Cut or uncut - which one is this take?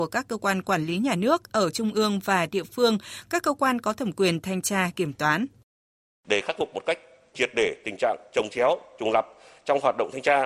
cut